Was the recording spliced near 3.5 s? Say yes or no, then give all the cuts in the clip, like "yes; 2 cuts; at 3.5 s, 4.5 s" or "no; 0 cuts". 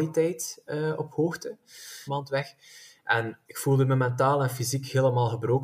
yes; 2 cuts; at 2.1 s, 3.5 s